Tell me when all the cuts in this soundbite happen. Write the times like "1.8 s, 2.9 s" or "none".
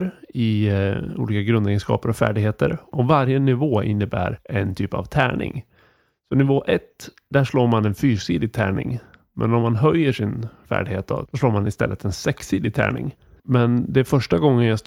11.3 s, 13.4 s